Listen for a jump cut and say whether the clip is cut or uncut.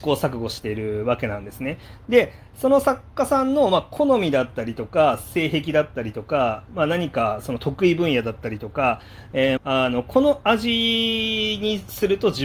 cut